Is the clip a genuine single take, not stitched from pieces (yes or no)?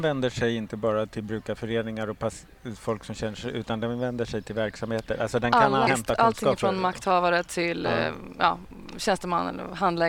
no